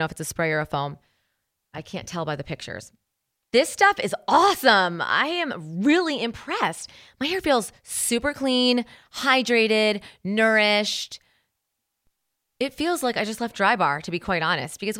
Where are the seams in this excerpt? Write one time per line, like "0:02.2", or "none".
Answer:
0:03.4